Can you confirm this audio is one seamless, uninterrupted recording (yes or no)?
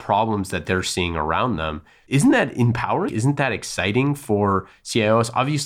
no